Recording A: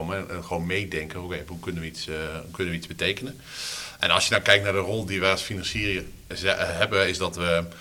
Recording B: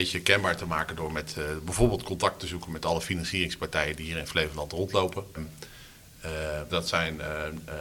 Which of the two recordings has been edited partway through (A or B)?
B